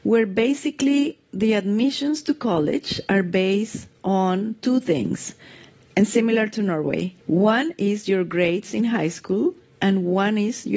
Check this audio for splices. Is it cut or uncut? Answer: cut